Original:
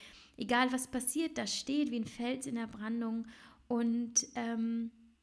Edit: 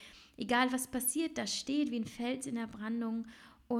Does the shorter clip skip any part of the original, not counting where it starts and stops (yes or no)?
no